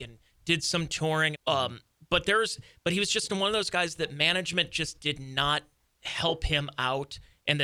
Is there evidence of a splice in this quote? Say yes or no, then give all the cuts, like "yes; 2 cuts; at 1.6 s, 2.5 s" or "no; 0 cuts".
yes; 1 cut; at 1.3 s